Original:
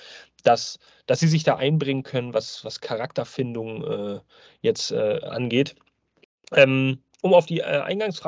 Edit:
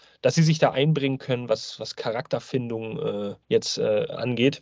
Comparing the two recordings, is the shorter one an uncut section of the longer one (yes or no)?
no